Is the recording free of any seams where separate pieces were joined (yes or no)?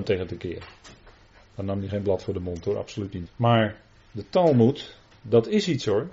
no